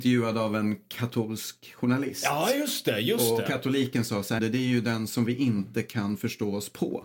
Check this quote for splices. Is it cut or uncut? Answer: cut